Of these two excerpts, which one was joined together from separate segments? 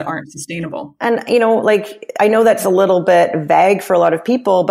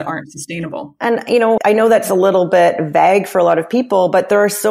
second; 1 cut; at 1.6 s

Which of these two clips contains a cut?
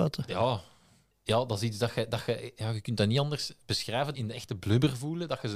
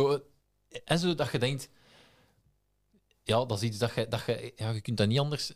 first; 2 cuts; at 1.1 s, 4.1 s

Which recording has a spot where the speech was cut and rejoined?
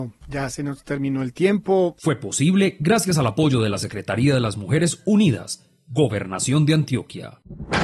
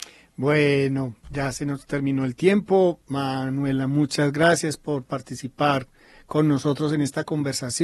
first; 1 cut; at 2.0 s

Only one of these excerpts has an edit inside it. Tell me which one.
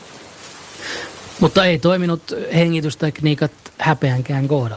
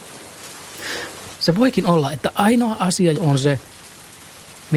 second; 2 cuts; at 1.3 s, 3.1 s

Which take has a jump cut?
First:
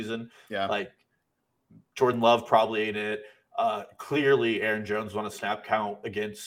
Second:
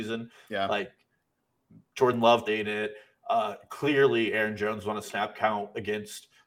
second; 1 cut; at 2.5 s

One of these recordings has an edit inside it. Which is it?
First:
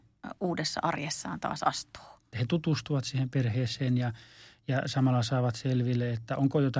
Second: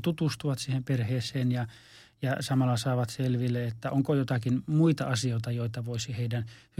first; 1 cut; at 2.3 s

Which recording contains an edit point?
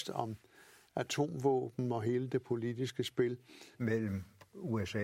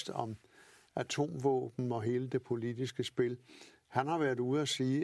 first; 1 cut; at 3.7 s

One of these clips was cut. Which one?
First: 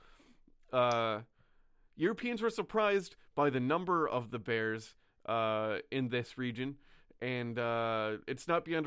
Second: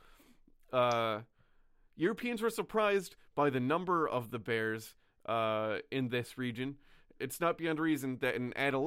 second; 1 cut; at 7.2 s

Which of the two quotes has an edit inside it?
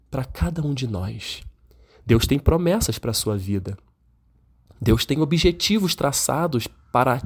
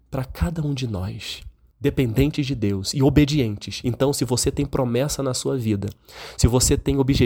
second; 1 cut; at 1.7 s

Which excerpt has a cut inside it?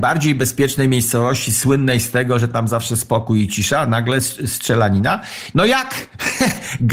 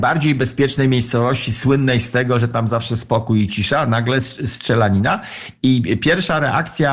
first; 1 cut; at 5.5 s

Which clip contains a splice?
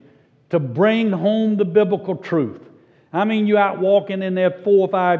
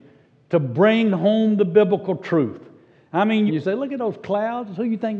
second; 1 cut; at 3.5 s

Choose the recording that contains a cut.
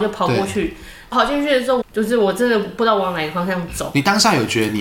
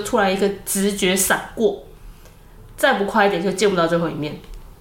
first; 1 cut; at 1.8 s

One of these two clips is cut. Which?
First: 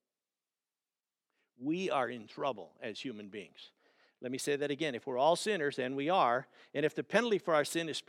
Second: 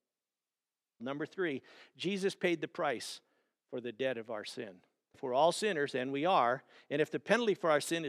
second; 2 cuts; at 1.0 s, 5.1 s

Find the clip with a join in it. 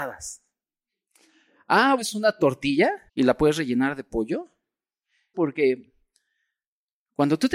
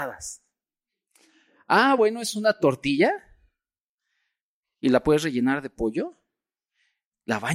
first; 3 cuts; at 2.0 s, 3.1 s, 5.3 s

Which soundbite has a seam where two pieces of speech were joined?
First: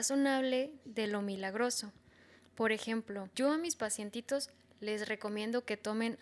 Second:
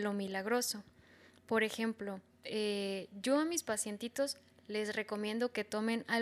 first; 1 cut; at 3.3 s

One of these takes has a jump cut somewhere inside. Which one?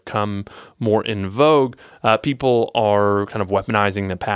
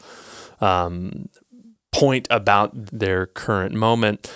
second; 1 cut; at 2.9 s

